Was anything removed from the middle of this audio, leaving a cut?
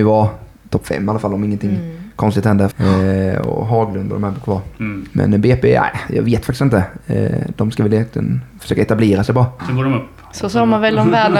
yes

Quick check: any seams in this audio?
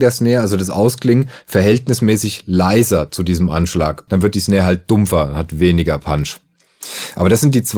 yes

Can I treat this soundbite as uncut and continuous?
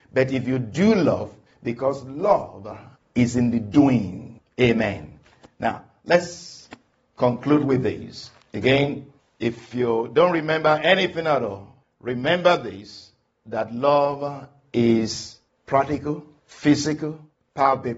yes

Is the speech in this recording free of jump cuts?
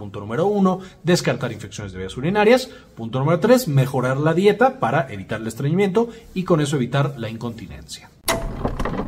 yes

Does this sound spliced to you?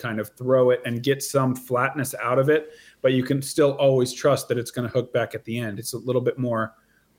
no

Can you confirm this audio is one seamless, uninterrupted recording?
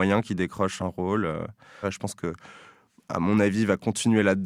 no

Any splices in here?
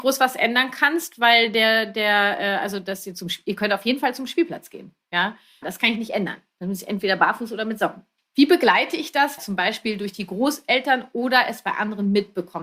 yes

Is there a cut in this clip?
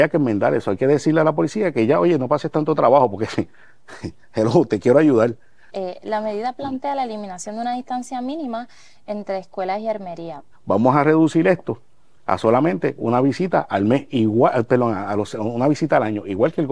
yes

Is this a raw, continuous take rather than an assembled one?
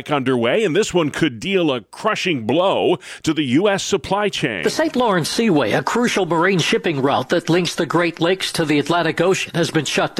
yes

